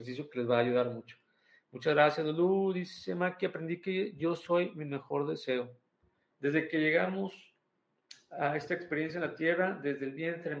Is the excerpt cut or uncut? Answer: cut